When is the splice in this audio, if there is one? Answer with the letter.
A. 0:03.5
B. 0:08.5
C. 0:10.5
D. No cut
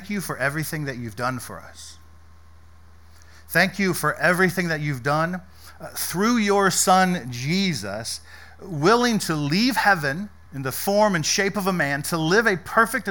C